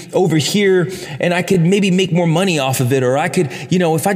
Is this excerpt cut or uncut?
uncut